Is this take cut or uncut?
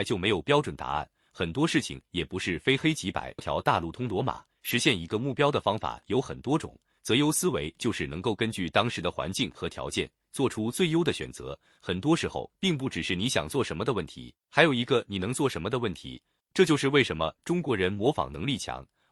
cut